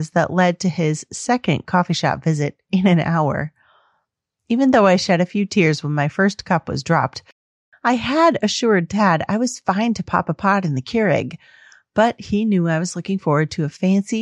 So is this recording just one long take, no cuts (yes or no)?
yes